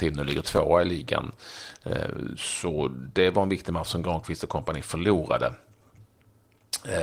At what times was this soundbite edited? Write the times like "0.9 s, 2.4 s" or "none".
none